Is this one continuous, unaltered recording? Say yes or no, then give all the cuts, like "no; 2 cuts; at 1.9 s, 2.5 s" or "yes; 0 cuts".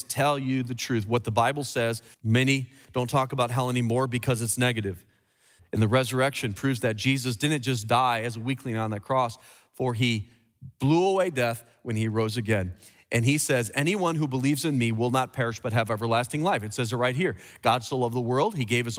no; 2 cuts; at 2.1 s, 5.6 s